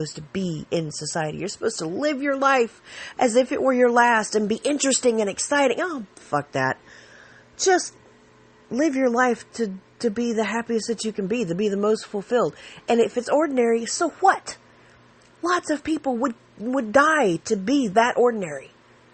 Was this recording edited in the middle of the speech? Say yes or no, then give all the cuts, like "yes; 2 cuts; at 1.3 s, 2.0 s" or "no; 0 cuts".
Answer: no; 0 cuts